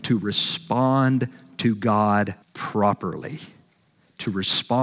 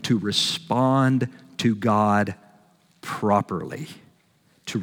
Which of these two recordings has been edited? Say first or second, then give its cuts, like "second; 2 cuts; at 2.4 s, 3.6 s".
first; 1 cut; at 2.4 s